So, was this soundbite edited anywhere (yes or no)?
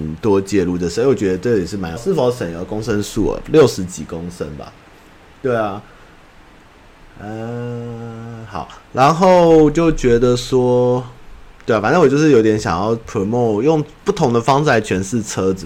yes